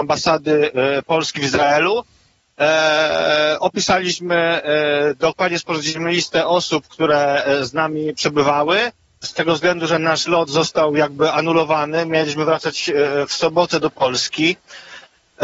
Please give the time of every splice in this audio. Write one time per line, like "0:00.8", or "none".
0:09.2